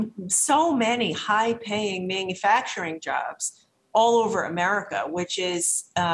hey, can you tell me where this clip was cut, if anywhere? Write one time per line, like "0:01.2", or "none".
none

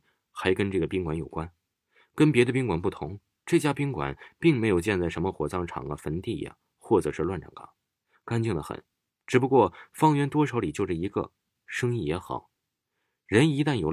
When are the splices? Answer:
0:09.1
0:11.5

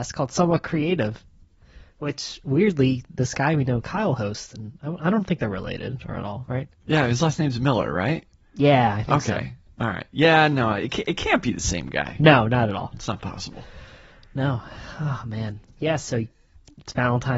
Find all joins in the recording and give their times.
0:12.9

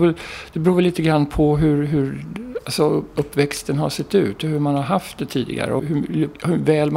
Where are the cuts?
0:05.8

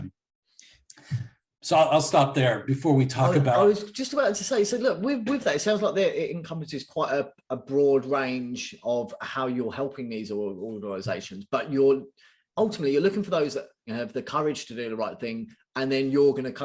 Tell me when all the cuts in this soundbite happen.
0:13.9

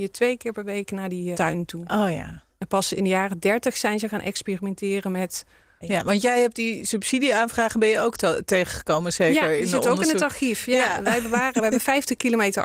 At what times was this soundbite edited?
0:01.3
0:05.8

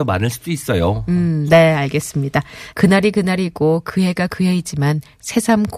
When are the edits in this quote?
0:01.5
0:02.7

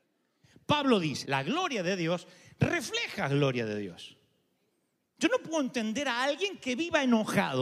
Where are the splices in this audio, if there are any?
0:01.2
0:05.0

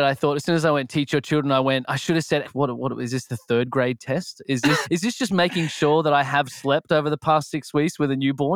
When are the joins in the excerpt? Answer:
0:02.4
0:04.8

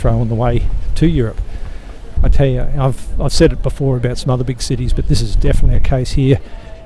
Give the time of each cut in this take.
0:02.2

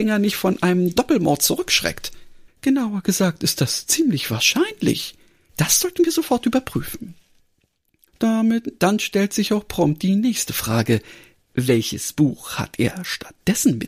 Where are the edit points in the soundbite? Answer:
0:02.5
0:05.5
0:08.1

